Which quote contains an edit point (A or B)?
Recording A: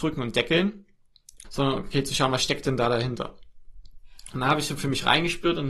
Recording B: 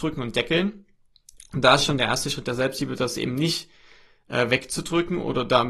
A